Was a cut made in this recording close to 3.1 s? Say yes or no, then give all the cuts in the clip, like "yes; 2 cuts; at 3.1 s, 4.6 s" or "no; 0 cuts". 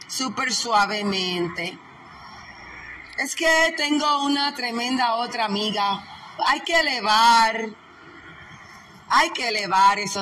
no; 1 cut; at 6.4 s